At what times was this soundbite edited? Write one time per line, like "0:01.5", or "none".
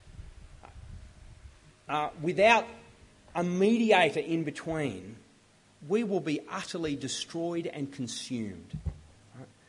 none